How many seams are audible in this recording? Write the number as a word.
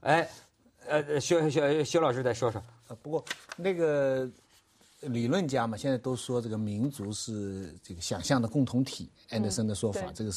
zero